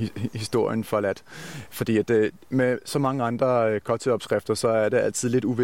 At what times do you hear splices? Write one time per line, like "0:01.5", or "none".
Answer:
none